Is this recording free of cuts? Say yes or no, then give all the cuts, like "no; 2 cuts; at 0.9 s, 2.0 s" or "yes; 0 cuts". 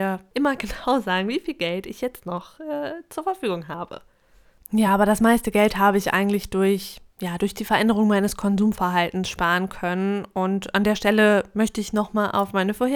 yes; 0 cuts